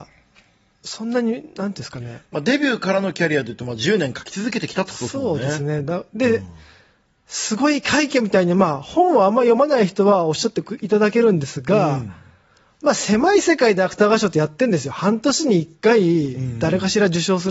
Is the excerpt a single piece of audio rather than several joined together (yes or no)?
yes